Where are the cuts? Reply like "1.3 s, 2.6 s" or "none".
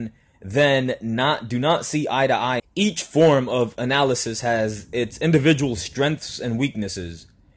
2.6 s